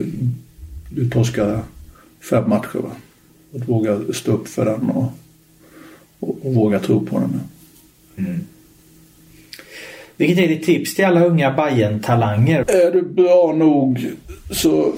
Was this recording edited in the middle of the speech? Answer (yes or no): yes